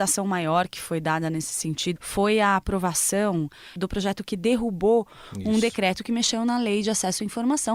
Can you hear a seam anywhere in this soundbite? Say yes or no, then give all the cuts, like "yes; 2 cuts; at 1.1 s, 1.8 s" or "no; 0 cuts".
yes; 1 cut; at 2.0 s